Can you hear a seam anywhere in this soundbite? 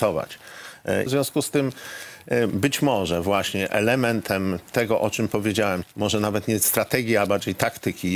yes; 2 cuts; at 1.1 s, 5.8 s

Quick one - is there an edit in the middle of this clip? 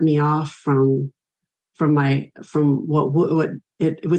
no; 0 cuts

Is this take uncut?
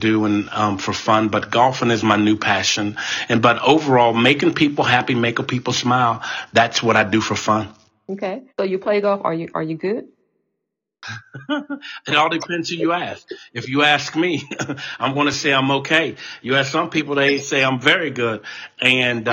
no; 1 cut; at 8.5 s

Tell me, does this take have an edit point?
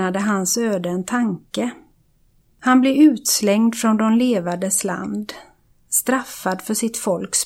no; 0 cuts

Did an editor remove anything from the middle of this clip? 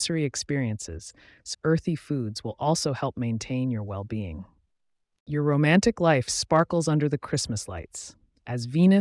yes; 1 cut; at 1.5 s

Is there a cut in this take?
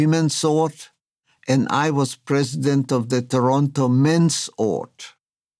no; 0 cuts

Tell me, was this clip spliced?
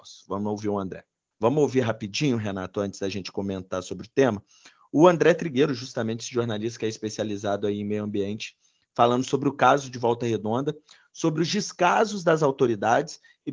yes; 1 cut; at 1.3 s

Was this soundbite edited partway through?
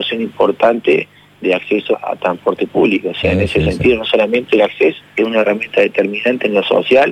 yes; 2 cuts; at 1.9 s, 5.0 s

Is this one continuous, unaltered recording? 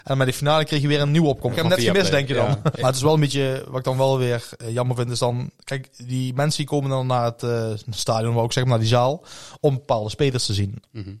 no; 2 cuts; at 1.5 s, 2.7 s

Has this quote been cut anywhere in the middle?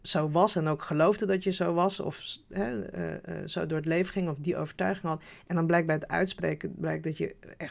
no; 0 cuts

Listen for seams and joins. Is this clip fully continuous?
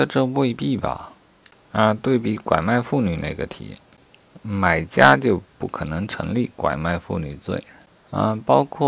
yes; 0 cuts

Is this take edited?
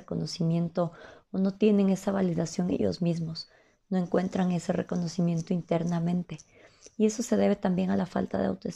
no; 0 cuts

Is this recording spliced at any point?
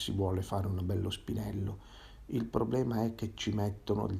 no; 0 cuts

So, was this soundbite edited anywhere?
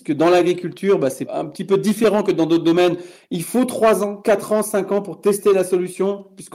no; 0 cuts

